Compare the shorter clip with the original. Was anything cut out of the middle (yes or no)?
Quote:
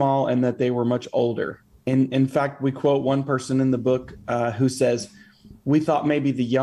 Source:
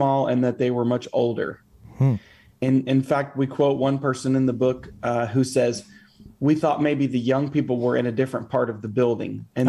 yes